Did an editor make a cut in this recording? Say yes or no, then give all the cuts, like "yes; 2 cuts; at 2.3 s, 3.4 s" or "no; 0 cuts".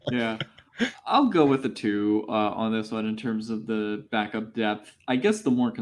no; 0 cuts